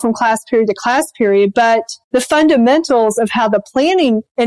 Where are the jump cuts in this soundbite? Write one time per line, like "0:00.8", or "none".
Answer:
0:02.0